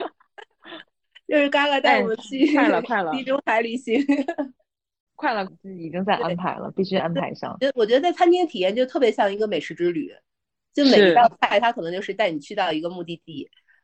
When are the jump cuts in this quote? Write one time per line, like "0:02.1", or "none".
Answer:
0:05.5